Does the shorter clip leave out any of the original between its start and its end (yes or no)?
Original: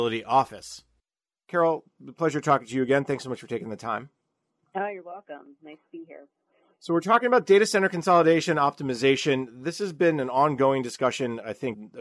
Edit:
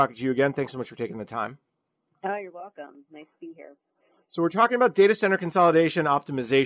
no